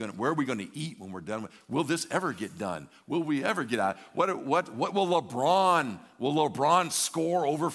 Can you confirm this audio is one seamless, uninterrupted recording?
yes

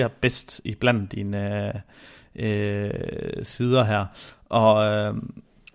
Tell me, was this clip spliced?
no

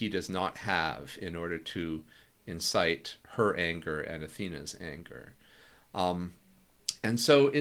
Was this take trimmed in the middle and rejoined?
no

